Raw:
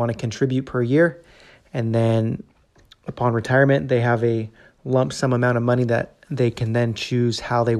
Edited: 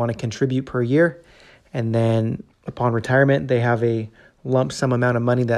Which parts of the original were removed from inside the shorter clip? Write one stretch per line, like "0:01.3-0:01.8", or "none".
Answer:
0:02.5-0:02.9